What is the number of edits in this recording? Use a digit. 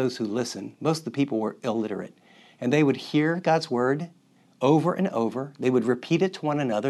0